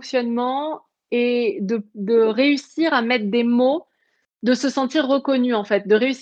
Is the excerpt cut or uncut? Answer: uncut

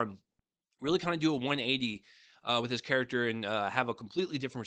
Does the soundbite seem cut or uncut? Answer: uncut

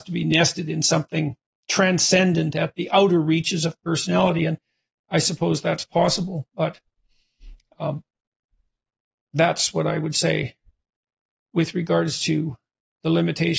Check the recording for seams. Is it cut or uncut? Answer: uncut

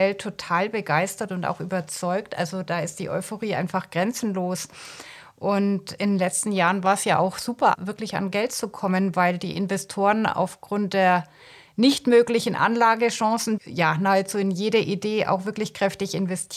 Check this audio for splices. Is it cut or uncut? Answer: cut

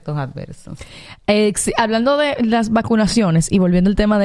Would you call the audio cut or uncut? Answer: uncut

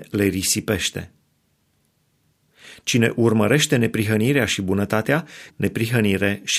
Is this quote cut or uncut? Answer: cut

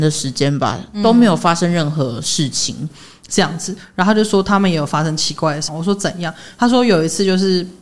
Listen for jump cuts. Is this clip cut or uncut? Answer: cut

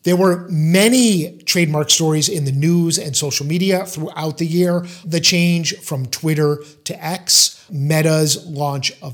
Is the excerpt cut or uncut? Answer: cut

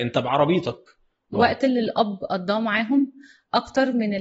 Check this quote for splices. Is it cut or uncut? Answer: cut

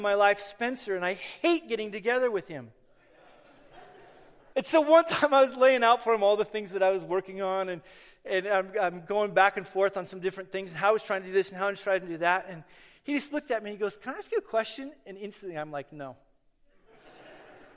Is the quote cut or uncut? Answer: cut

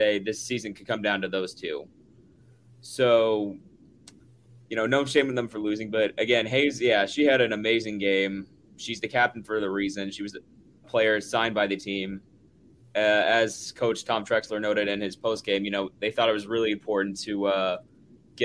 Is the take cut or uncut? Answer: cut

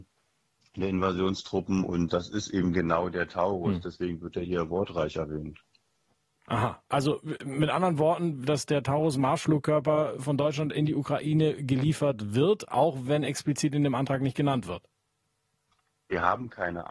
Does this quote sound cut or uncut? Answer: cut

